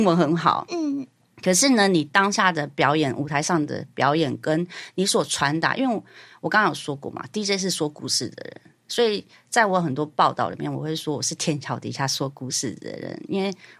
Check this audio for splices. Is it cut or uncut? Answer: uncut